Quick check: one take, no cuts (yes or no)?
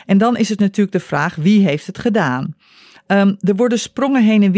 no